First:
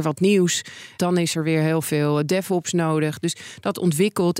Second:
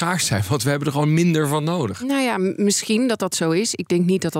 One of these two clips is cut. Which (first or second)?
first